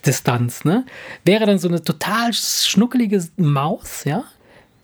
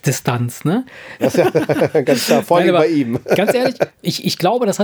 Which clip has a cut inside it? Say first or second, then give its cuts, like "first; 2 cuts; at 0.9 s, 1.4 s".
second; 2 cuts; at 1.2 s, 3.9 s